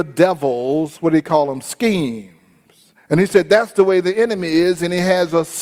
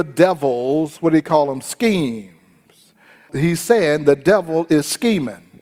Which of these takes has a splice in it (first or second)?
first